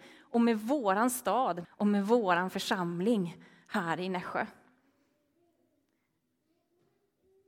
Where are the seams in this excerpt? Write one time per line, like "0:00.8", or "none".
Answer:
0:01.6